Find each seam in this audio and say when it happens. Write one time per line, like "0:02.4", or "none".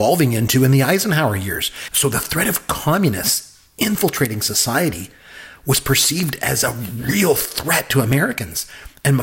0:01.9